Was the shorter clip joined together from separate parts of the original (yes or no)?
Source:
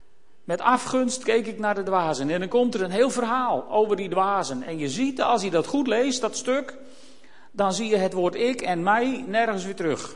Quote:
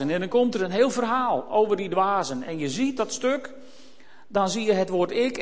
yes